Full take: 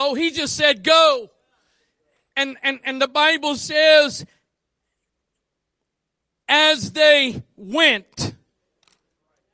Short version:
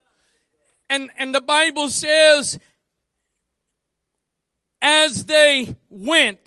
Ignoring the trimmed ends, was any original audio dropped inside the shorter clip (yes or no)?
yes